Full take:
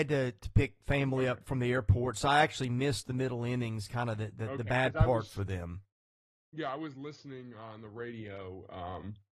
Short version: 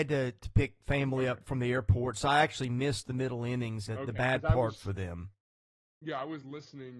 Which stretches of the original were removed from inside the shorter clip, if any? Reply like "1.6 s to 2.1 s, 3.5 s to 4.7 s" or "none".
3.9 s to 4.4 s